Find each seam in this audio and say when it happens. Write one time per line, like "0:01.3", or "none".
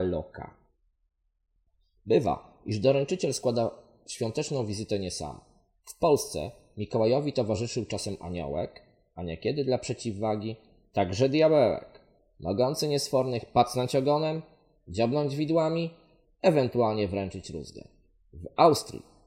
none